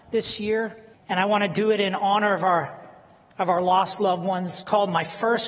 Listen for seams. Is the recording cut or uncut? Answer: cut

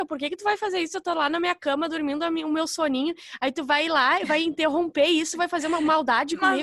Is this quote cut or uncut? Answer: uncut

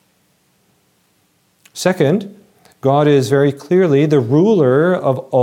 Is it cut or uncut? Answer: uncut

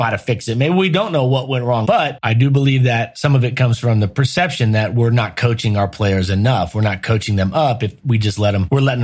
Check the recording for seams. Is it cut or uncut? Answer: cut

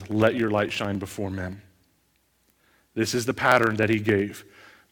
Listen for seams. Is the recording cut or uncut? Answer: uncut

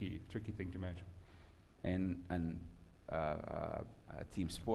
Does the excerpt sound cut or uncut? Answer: cut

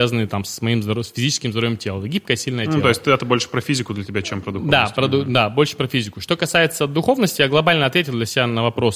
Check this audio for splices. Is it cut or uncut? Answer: uncut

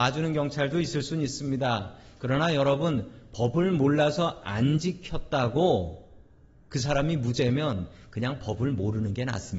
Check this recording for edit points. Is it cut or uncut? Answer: uncut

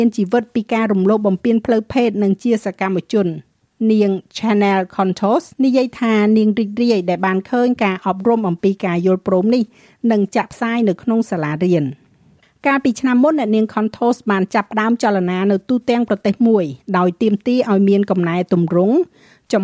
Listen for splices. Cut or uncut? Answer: cut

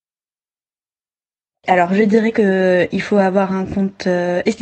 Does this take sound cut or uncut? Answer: uncut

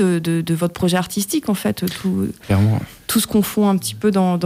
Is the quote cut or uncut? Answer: uncut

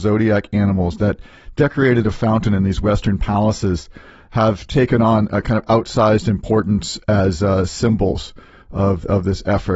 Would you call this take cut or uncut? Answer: uncut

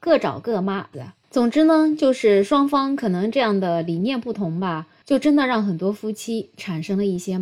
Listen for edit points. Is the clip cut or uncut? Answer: cut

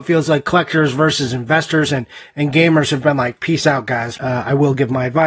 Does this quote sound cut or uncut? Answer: cut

